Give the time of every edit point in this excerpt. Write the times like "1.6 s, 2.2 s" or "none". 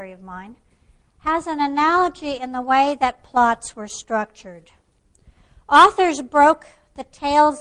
none

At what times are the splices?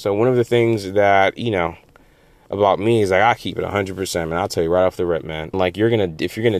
5.5 s

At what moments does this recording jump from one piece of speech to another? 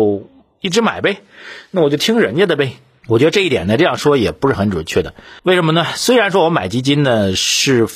5.4 s

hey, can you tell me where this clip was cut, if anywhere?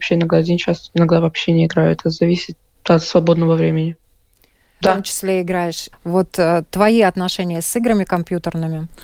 4.8 s, 5.9 s

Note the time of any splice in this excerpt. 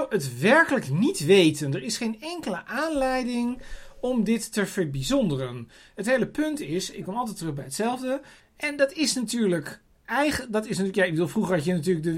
8.4 s

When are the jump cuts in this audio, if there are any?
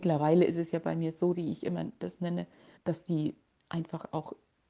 1.3 s, 2.8 s

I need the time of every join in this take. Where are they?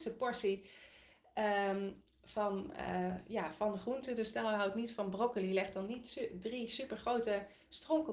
none

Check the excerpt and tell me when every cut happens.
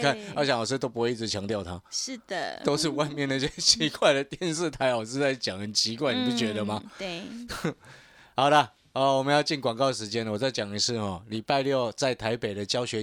none

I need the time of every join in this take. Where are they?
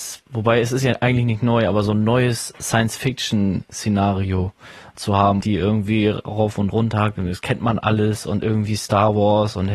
5.4 s

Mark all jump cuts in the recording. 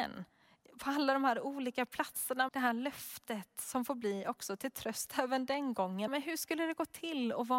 2.5 s, 6.1 s

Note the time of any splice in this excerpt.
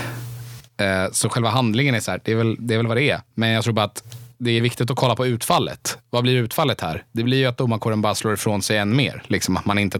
none

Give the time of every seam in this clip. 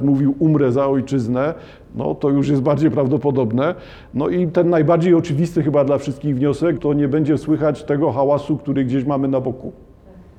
6.8 s

